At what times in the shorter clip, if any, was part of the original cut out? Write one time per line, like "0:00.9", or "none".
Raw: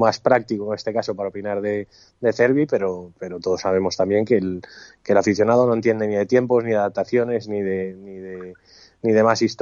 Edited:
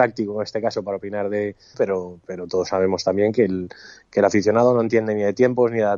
0:01.7